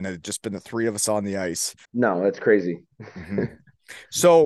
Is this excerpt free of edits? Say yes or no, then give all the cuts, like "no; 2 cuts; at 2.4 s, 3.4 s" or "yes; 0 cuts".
no; 1 cut; at 1.8 s